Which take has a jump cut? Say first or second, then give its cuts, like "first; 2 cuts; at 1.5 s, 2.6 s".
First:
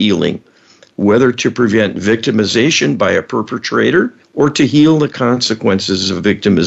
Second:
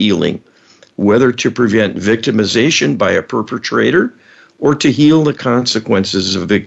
first; 1 cut; at 4.2 s